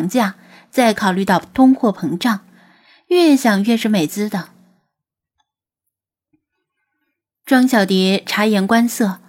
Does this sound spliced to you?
yes; 1 cut; at 4.1 s

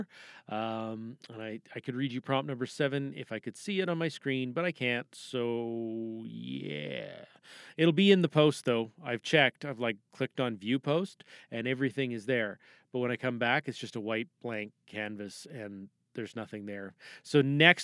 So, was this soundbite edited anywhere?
no; 0 cuts

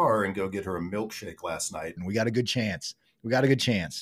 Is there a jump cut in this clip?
yes; 1 cut; at 2.0 s

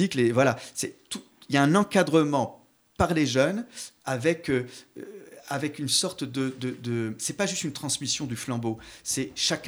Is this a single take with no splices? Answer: yes; 0 cuts

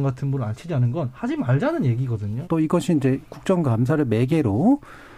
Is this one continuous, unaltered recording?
no; 1 cut; at 2.4 s

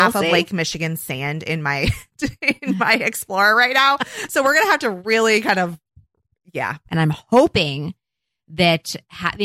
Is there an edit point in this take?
yes; 1 cut; at 6.9 s

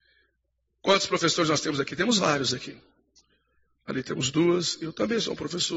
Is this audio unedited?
yes; 0 cuts

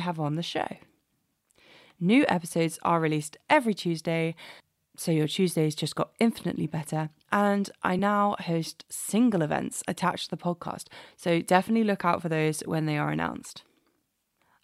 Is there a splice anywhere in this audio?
no; 0 cuts

